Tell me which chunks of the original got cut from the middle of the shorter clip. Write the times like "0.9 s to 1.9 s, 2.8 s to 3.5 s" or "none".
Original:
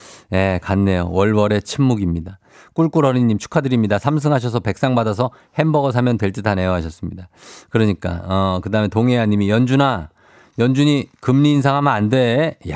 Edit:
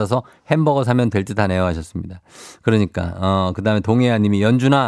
none